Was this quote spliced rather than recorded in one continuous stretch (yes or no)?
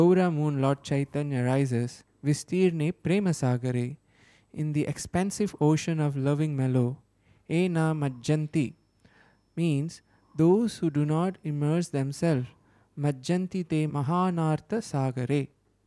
yes